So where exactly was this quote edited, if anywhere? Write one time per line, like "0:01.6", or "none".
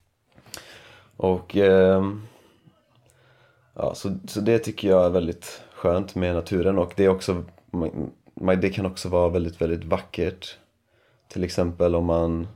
none

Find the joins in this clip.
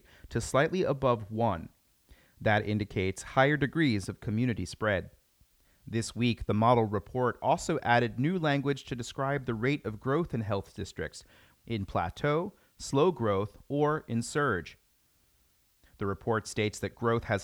0:11.5

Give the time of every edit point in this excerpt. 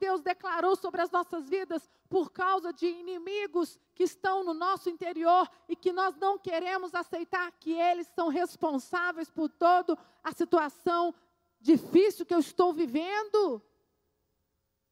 none

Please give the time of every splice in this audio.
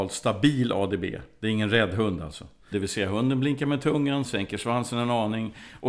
0:02.7
0:04.2

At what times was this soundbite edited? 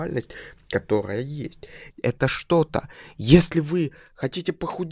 0:01.9

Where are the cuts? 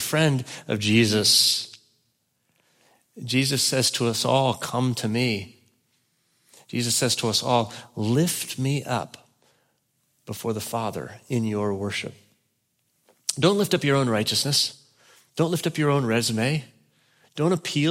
none

